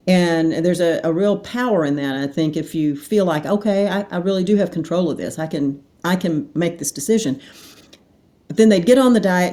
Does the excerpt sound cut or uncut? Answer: uncut